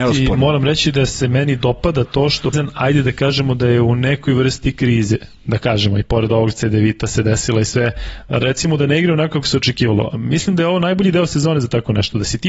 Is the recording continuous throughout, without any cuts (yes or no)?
no